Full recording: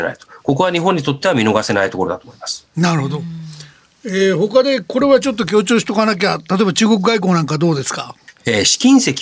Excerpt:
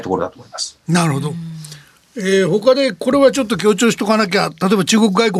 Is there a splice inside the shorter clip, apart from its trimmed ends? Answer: no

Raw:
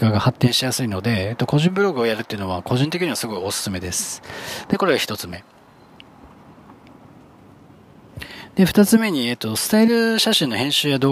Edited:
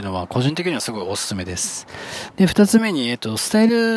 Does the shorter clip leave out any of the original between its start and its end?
yes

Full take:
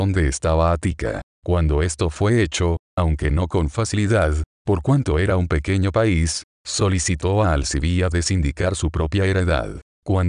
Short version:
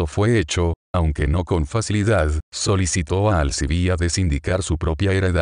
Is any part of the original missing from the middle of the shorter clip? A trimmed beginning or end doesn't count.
yes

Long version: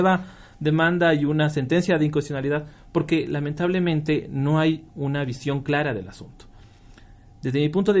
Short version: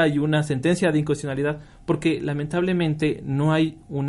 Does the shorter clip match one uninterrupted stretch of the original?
yes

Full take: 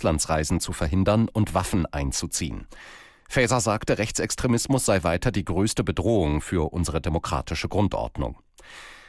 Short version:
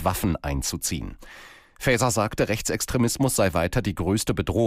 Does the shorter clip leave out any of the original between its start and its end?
no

